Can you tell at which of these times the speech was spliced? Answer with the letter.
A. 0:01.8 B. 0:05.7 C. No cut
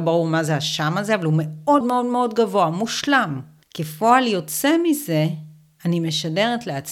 A